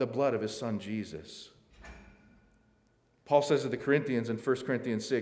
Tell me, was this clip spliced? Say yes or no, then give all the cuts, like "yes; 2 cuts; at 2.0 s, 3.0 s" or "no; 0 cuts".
no; 0 cuts